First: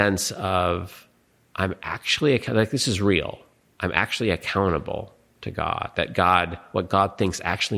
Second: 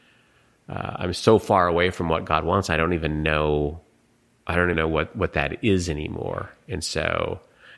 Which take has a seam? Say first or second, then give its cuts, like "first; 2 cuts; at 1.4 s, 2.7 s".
second; 1 cut; at 4.7 s